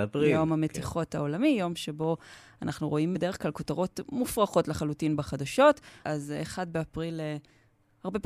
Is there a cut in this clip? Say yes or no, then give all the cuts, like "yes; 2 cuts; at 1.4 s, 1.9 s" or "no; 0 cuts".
yes; 2 cuts; at 3.1 s, 6.0 s